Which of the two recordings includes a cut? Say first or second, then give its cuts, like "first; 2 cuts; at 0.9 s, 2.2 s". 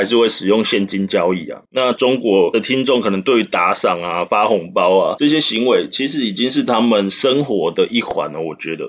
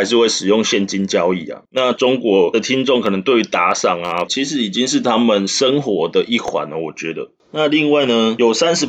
second; 1 cut; at 4.3 s